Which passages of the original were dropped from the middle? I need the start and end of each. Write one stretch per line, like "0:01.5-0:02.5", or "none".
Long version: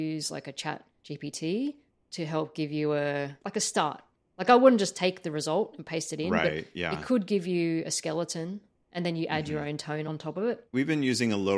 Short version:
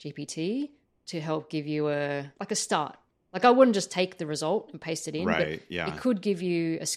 none